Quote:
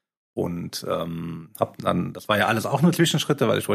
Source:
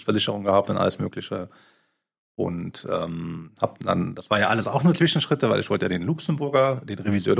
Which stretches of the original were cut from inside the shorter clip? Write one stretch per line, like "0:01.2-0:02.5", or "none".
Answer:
none